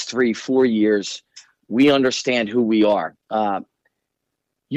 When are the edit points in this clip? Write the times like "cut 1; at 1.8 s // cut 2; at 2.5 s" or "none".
cut 1; at 3.2 s